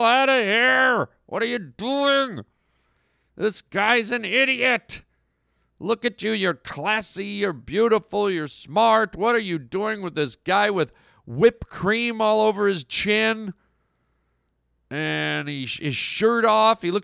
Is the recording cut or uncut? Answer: uncut